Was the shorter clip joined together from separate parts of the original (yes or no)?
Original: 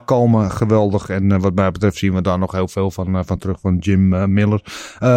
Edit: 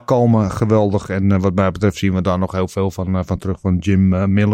no